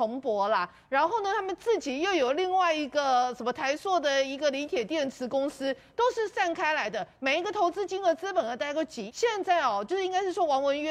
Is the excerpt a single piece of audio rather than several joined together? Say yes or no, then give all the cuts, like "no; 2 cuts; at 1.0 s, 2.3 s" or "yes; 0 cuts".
no; 1 cut; at 9.1 s